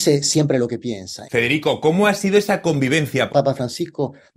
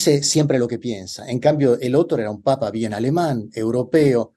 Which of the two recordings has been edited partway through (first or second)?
first